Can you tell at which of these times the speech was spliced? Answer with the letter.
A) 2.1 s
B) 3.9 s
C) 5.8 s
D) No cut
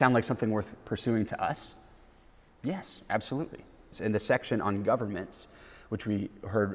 B